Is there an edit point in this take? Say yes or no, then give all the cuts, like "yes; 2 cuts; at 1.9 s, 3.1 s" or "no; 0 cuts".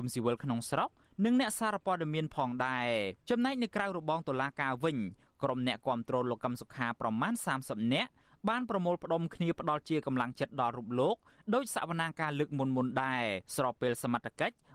yes; 2 cuts; at 3.2 s, 13.5 s